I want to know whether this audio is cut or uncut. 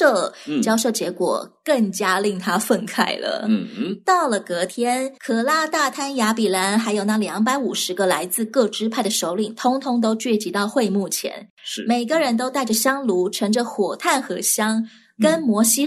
uncut